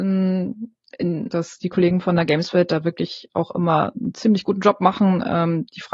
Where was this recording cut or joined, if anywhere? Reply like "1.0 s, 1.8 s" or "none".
1.3 s